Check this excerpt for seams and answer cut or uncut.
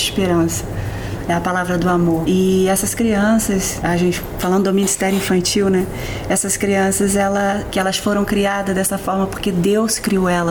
cut